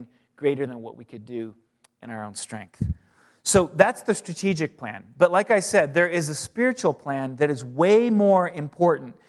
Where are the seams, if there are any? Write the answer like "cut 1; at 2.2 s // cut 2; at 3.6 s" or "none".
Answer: none